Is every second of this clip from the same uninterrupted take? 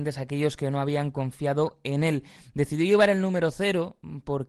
yes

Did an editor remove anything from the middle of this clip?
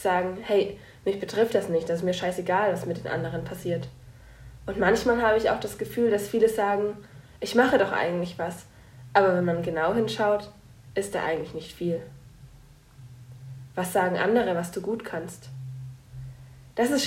no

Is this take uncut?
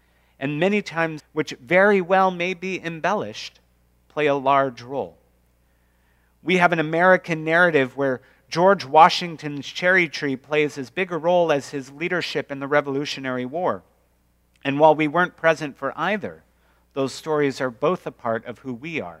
no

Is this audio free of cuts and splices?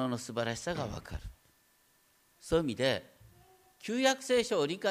yes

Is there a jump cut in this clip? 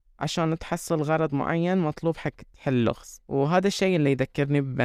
yes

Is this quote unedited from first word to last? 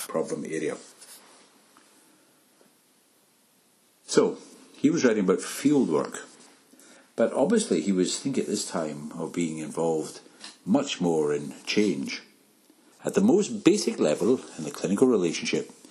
no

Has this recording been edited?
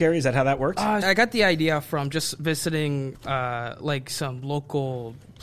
yes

